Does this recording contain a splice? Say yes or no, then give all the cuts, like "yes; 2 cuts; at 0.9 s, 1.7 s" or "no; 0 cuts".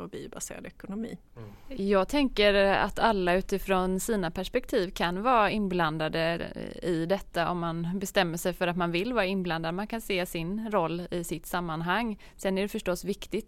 no; 0 cuts